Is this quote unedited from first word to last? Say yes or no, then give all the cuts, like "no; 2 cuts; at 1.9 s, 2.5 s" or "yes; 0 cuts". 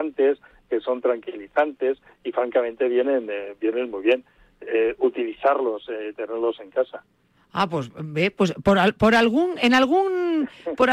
yes; 0 cuts